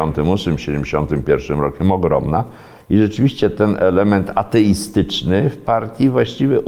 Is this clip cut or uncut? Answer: uncut